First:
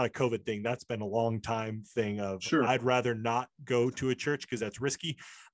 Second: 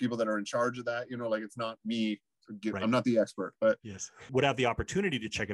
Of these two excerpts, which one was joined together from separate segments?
second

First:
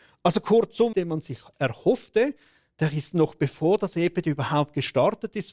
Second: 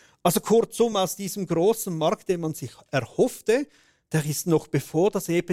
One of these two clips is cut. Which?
first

